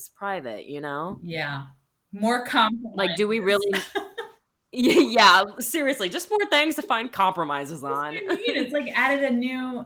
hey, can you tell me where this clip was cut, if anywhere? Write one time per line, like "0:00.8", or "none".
none